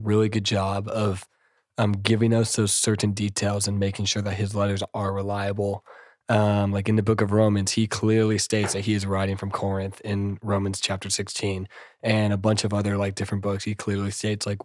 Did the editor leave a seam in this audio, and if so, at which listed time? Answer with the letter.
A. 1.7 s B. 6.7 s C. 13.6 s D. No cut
D